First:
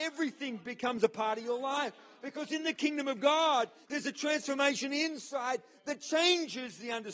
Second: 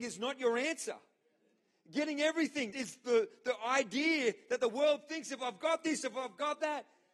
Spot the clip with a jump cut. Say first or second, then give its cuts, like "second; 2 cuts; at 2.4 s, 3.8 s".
second; 1 cut; at 2.7 s